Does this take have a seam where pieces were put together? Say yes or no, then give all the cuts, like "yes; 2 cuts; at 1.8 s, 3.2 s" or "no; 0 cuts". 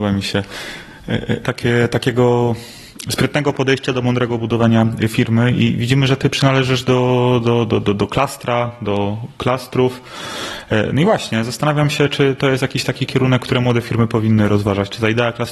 yes; 1 cut; at 1.4 s